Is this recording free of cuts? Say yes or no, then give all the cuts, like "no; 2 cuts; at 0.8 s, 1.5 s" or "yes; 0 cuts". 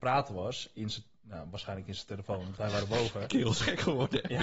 yes; 0 cuts